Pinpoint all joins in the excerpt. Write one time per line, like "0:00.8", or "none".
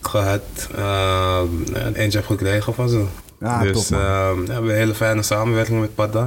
0:01.9

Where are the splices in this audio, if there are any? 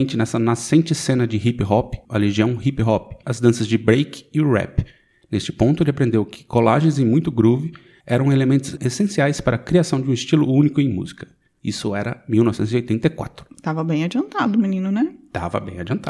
0:02.0
0:03.2

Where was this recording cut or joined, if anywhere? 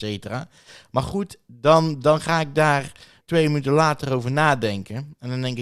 0:03.2

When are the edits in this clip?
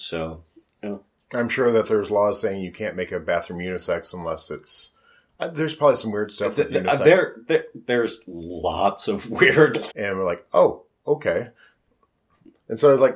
0:09.9

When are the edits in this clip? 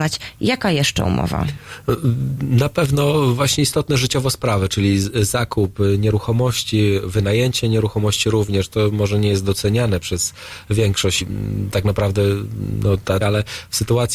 0:11.2
0:13.2

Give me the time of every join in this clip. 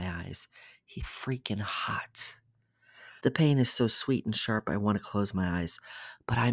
0:01.0
0:03.2

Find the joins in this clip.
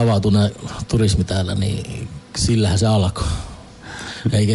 none

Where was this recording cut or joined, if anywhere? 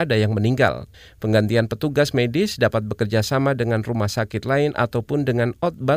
0:01.1

